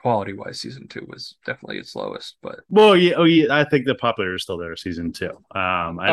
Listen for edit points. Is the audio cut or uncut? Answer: uncut